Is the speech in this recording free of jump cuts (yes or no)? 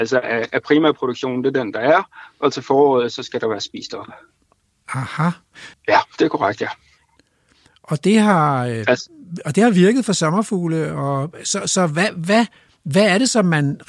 no